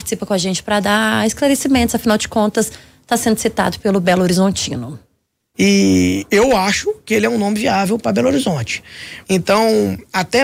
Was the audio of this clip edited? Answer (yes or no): yes